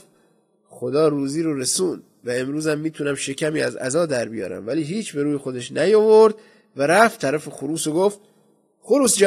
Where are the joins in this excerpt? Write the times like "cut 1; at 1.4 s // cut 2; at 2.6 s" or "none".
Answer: none